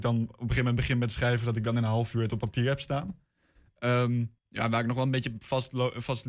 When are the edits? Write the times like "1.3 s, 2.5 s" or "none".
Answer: 4.4 s